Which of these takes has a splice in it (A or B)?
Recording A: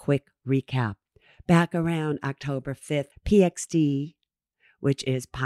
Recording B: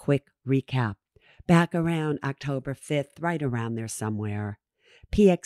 A